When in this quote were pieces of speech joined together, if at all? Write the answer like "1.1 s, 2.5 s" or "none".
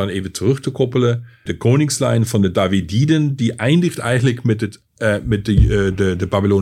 1.5 s